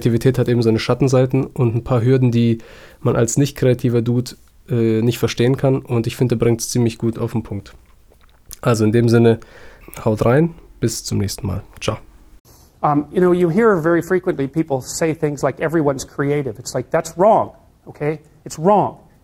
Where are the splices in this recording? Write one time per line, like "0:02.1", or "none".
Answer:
none